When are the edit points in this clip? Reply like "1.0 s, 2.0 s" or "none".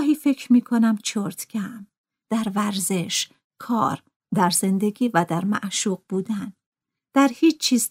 2.2 s